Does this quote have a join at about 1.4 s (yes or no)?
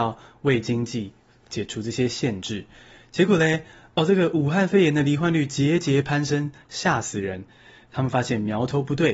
yes